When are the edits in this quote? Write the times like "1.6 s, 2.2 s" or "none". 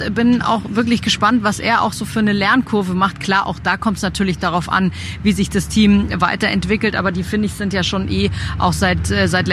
none